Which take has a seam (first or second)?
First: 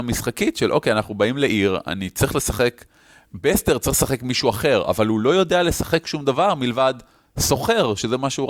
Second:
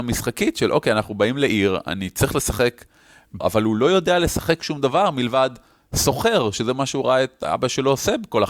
second